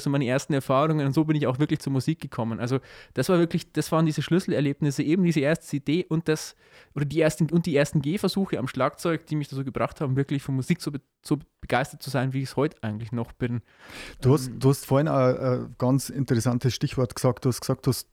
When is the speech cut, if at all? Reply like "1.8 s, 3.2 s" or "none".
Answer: none